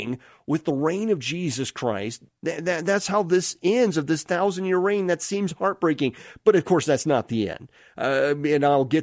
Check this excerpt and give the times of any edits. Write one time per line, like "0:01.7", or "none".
0:02.3